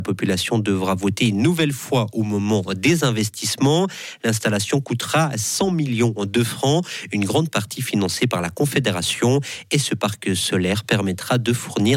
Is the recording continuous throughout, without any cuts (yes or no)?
yes